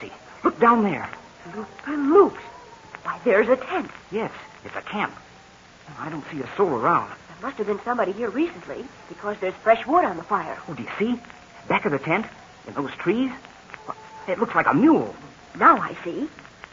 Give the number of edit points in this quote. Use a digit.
0